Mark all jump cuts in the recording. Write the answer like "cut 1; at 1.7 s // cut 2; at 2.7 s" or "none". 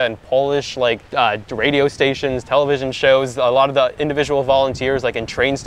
cut 1; at 1.0 s